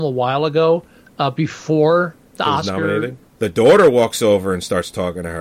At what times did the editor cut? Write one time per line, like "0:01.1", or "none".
0:03.2